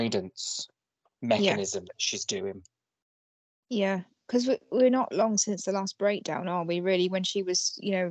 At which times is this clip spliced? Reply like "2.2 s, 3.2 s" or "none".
none

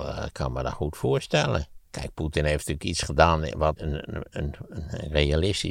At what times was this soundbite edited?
1.8 s, 3.8 s

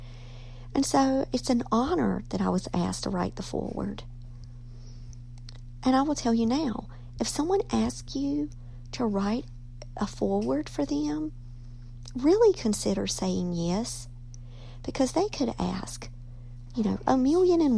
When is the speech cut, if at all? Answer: none

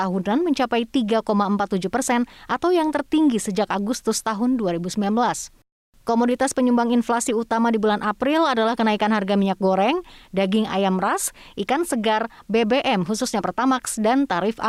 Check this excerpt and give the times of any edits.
none

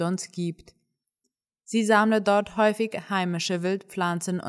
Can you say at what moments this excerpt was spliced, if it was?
none

